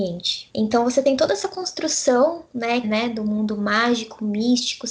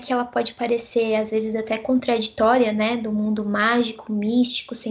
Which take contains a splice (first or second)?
first